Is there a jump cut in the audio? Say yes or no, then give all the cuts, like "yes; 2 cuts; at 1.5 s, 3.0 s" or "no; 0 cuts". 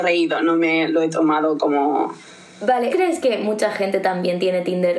yes; 1 cut; at 2.9 s